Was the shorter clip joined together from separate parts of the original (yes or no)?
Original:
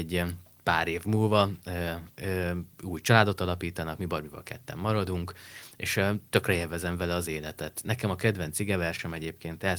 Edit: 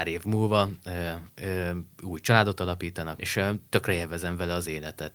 yes